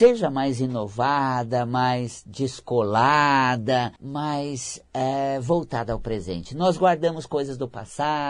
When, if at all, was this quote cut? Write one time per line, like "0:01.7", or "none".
0:04.0

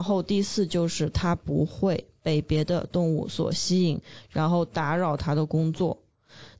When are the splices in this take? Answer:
none

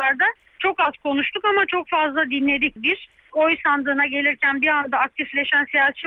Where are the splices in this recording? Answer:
0:02.8

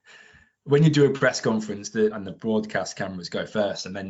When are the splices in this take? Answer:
0:02.1

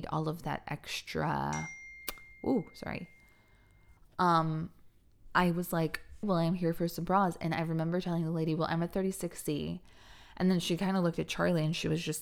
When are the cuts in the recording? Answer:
0:04.0
0:06.2

